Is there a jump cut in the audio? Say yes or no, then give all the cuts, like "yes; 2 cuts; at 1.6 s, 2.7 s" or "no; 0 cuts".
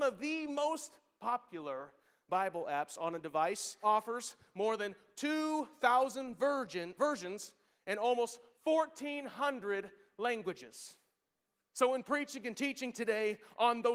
yes; 3 cuts; at 3.8 s, 7.0 s, 11.6 s